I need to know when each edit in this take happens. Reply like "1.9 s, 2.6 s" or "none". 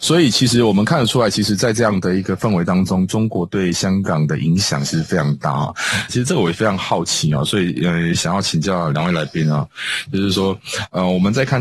6.1 s

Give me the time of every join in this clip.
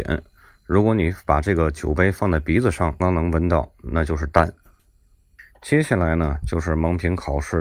3.0 s

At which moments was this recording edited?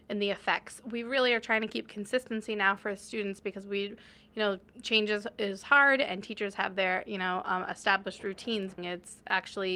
8.8 s

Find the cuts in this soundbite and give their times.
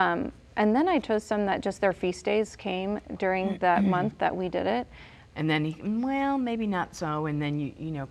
5.3 s

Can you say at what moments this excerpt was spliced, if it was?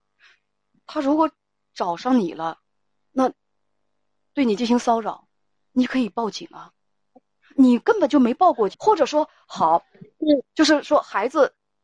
8.7 s

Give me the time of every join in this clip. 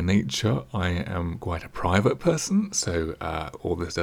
none

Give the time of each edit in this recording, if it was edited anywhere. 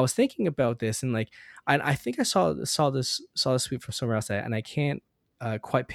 none

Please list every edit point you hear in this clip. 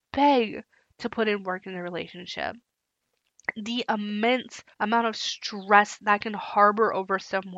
4.7 s, 6.0 s

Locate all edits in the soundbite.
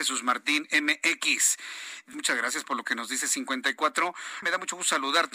2.1 s, 4.4 s

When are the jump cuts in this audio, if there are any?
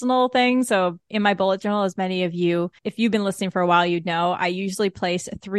2.8 s

